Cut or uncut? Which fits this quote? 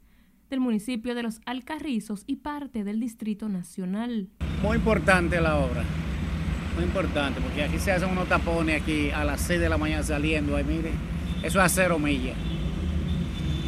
uncut